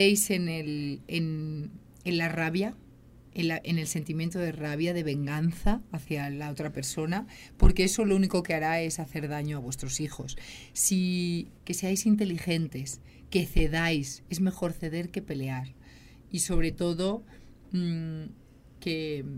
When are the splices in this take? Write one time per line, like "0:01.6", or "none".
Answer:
0:11.6